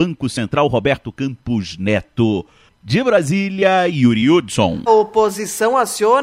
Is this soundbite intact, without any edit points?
no; 2 cuts; at 2.7 s, 4.9 s

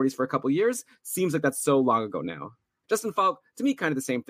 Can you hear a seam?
yes; 1 cut; at 2.8 s

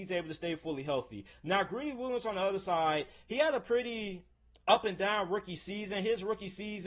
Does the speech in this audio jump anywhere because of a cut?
no; 0 cuts

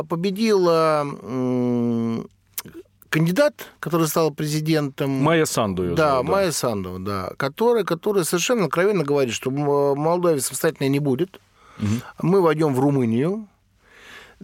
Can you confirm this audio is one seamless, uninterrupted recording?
no; 1 cut; at 3.8 s

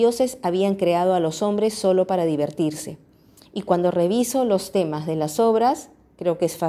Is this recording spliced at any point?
no; 0 cuts

